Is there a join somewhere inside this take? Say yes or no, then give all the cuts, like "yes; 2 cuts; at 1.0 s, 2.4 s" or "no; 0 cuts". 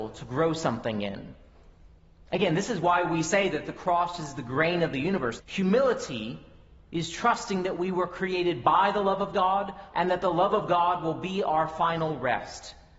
yes; 2 cuts; at 5.4 s, 9.9 s